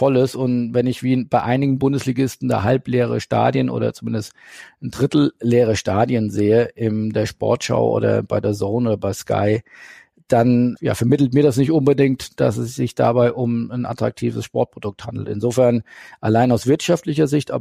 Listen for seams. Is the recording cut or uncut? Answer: cut